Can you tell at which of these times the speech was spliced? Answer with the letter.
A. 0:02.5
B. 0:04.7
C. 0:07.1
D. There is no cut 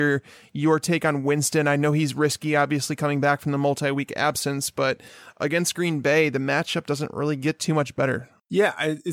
D